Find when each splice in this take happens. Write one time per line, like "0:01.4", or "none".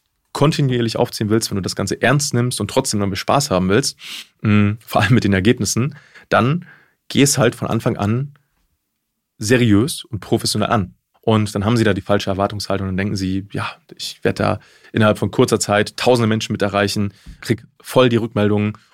0:11.1
0:17.4